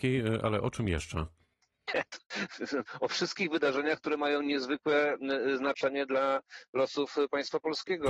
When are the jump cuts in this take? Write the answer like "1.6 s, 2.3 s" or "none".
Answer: none